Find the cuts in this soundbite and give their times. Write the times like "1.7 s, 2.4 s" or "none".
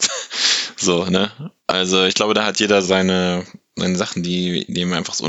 1.6 s, 2.8 s